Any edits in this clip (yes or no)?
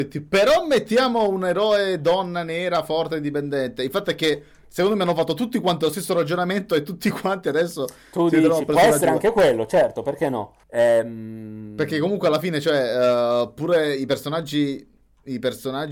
yes